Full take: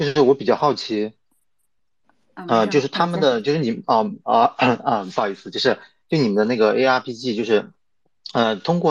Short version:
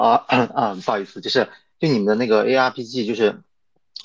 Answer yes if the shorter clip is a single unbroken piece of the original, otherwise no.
yes